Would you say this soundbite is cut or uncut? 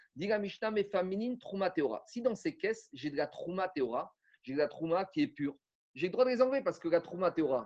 uncut